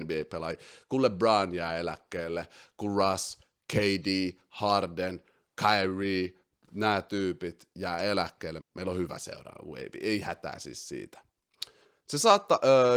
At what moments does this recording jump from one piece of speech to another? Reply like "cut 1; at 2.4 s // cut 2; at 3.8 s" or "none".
cut 1; at 8.6 s